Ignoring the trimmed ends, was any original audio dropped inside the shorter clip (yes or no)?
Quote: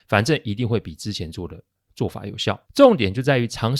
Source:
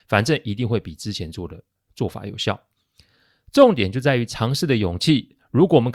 yes